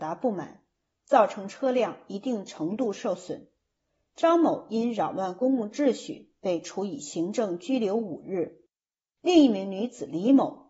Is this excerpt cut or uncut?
uncut